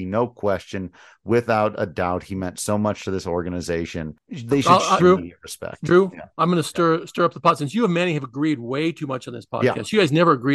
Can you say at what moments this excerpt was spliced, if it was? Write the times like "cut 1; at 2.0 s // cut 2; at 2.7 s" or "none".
cut 1; at 5.0 s